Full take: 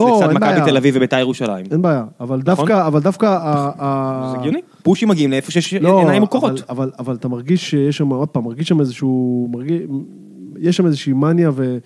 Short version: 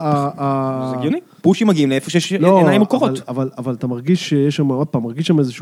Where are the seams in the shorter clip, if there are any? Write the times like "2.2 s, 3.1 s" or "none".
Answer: none

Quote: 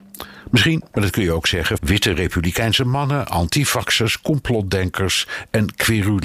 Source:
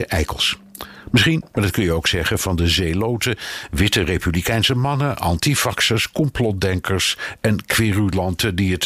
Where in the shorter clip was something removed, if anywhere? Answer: 1.8 s

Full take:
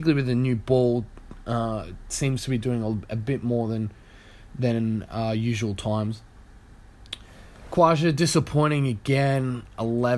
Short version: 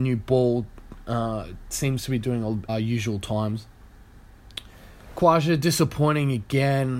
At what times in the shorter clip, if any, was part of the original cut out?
2.7 s

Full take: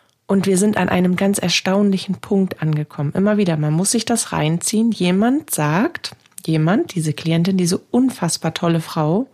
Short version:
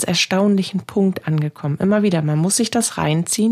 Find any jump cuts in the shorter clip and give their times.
none

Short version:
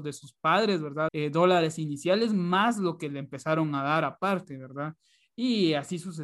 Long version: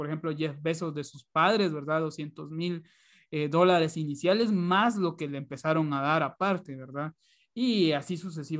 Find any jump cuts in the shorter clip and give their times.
1.1 s

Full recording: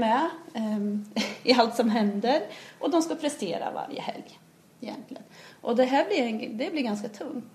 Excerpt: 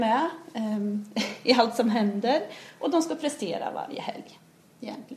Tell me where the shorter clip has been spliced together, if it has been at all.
none

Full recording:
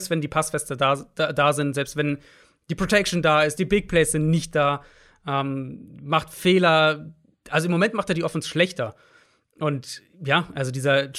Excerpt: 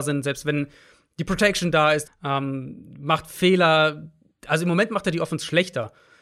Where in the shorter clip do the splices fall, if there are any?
2.0 s

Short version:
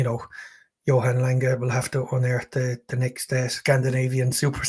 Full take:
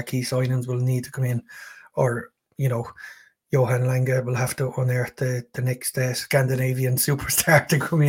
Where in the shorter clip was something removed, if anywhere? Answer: none

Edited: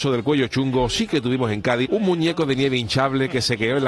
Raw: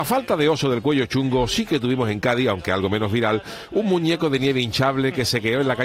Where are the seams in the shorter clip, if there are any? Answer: 1.8 s

